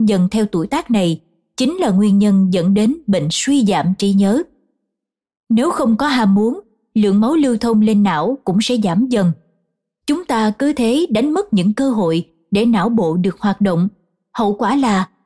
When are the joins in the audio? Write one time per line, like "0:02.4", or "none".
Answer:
none